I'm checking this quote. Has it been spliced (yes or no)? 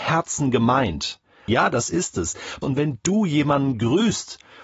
yes